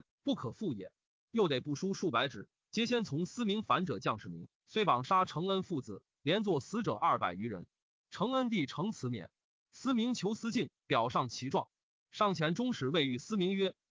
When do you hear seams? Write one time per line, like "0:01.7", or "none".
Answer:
0:04.5

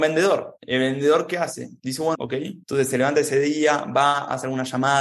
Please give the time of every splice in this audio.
0:02.2

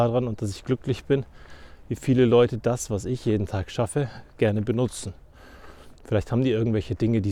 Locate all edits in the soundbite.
0:06.0

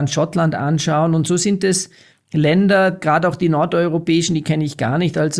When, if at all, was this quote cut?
none

